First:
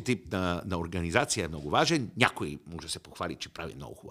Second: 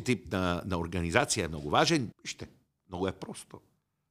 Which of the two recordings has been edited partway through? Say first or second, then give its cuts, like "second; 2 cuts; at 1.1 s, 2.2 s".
second; 1 cut; at 2.1 s